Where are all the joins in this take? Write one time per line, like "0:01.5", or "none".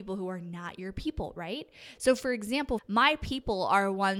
0:02.8